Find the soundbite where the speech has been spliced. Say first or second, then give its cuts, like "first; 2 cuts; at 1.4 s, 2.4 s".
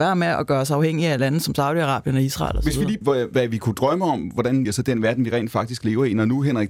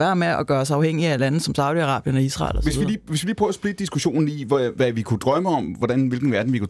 first; 2 cuts; at 3.0 s, 4.6 s